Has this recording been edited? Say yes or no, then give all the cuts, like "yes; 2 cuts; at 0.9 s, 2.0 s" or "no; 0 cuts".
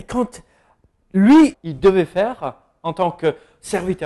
yes; 1 cut; at 1.5 s